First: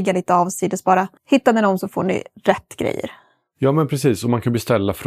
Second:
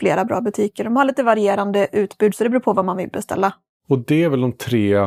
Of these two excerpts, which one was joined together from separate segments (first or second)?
first